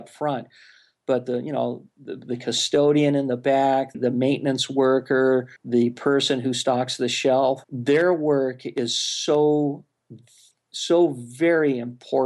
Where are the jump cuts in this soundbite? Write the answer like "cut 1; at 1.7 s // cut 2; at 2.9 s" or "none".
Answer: cut 1; at 3.9 s // cut 2; at 5.6 s // cut 3; at 7.6 s